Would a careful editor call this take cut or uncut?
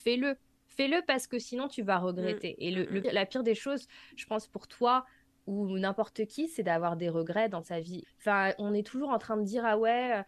cut